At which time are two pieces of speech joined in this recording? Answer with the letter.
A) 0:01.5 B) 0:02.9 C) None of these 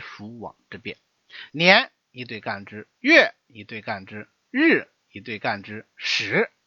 A